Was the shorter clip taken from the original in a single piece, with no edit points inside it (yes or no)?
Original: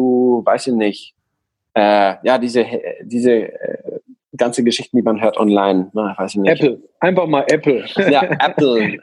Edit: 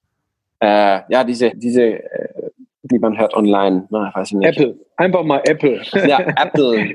no